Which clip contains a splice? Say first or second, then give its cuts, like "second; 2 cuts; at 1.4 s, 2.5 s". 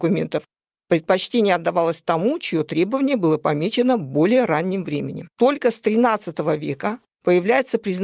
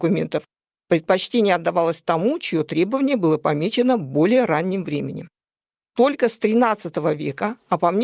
first; 2 cuts; at 5.3 s, 7.0 s